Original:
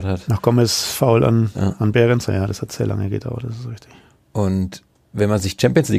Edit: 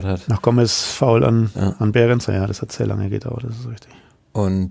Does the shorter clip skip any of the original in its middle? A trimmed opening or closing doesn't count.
no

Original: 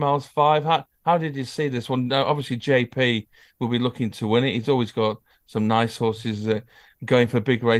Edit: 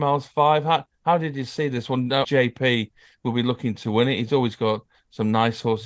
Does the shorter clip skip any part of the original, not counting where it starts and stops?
yes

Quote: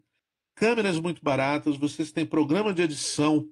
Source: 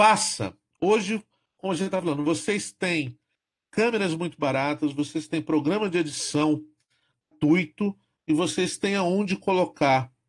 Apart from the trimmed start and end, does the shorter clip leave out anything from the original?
no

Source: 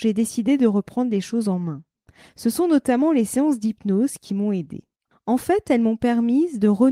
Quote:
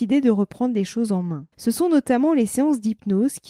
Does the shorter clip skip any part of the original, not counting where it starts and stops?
yes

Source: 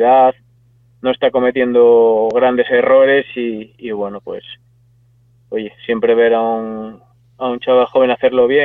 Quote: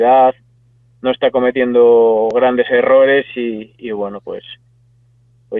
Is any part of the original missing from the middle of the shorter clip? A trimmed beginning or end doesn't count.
no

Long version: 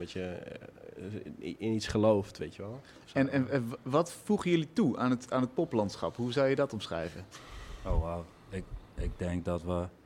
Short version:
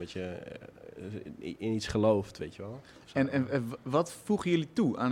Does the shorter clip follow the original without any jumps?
yes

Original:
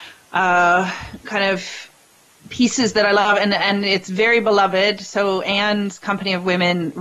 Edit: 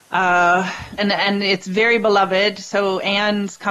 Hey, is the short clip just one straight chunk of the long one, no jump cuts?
no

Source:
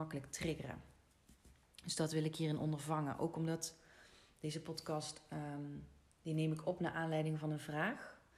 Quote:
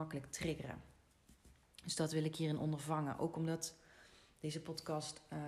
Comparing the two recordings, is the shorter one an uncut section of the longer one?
yes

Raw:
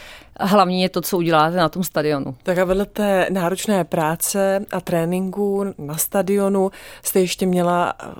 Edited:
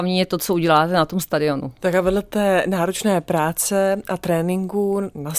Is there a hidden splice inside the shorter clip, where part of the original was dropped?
no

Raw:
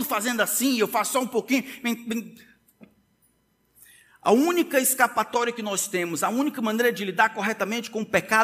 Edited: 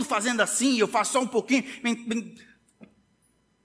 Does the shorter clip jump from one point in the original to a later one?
no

